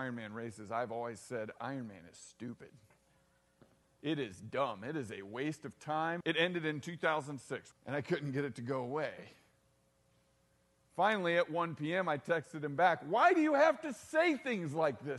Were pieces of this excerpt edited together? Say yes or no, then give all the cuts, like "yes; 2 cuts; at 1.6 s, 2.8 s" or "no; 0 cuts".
yes; 2 cuts; at 6.2 s, 7.7 s